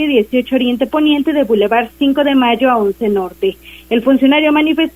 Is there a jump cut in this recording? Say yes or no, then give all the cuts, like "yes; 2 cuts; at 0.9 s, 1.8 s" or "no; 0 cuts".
no; 0 cuts